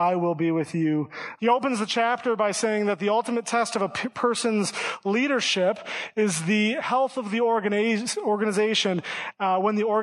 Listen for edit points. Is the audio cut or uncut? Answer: cut